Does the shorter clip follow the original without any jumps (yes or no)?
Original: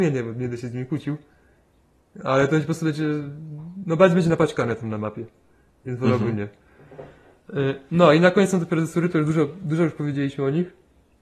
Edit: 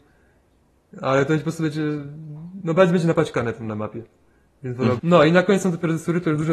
no